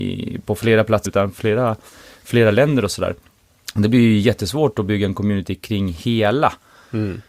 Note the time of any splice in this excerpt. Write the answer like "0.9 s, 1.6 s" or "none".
1.1 s